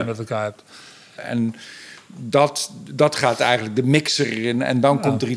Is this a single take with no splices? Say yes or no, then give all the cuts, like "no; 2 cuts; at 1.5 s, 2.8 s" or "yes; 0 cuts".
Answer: no; 1 cut; at 1.2 s